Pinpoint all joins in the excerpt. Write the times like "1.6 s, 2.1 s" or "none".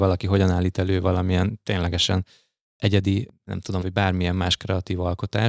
3.8 s